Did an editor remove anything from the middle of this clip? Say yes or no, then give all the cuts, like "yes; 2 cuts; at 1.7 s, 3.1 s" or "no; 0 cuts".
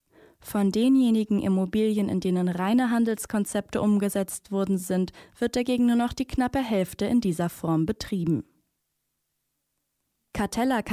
no; 0 cuts